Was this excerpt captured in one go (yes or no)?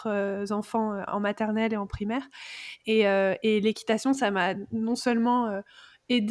yes